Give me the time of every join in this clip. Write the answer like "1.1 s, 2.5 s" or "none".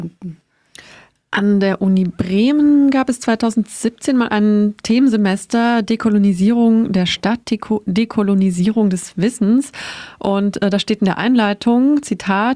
none

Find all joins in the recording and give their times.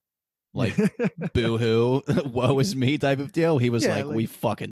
none

